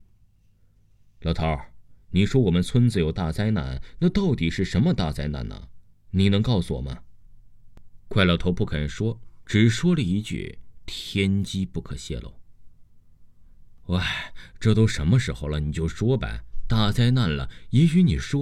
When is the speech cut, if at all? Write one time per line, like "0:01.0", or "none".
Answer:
none